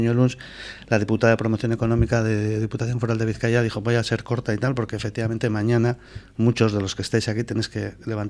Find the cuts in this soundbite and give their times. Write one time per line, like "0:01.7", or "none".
none

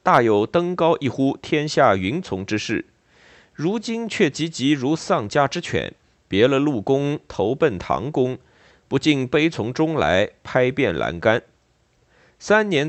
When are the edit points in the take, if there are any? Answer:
none

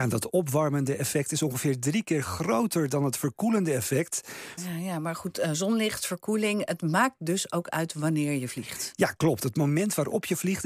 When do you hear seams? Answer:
0:04.6

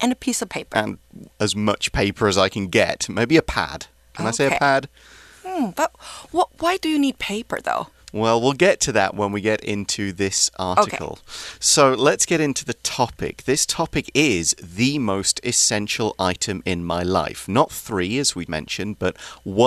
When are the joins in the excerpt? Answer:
0:18.5

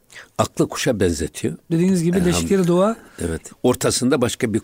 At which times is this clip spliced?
0:01.7
0:03.5

